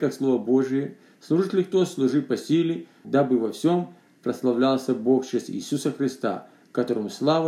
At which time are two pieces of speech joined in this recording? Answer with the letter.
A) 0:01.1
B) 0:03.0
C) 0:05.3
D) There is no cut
B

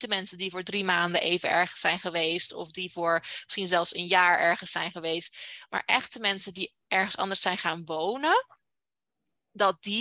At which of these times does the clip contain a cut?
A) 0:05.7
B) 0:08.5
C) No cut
C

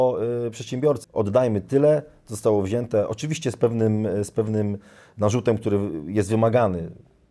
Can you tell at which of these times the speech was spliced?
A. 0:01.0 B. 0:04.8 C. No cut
A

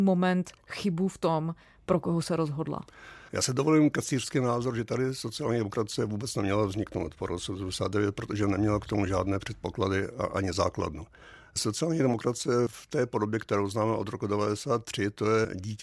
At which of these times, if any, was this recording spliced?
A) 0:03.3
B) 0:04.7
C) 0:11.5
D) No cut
A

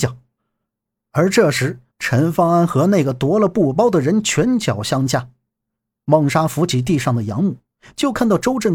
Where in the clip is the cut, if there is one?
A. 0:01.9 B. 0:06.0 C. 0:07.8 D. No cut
A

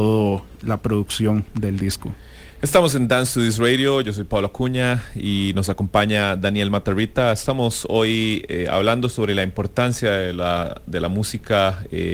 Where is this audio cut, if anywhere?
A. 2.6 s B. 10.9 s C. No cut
C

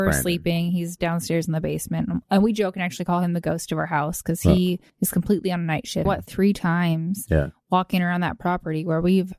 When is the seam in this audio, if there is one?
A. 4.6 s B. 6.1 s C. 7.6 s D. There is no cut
B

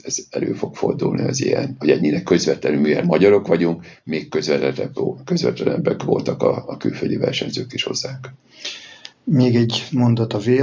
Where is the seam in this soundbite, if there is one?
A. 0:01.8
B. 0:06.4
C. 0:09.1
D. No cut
C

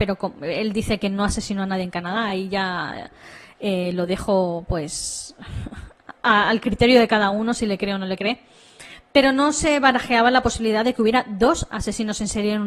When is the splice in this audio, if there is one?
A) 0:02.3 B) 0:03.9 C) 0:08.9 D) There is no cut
D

